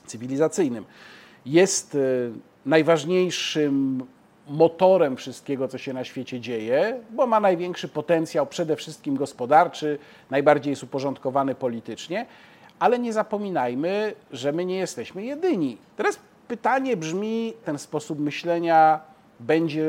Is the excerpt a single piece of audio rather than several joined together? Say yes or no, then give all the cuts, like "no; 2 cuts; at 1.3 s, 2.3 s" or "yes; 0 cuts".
no; 2 cuts; at 15.8 s, 17.6 s